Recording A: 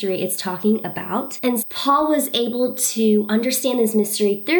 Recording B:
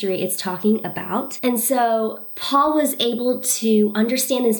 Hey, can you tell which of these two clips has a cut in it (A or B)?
A